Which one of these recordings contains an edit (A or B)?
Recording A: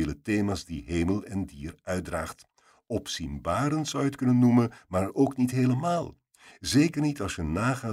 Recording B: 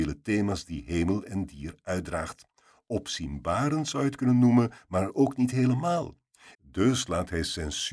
B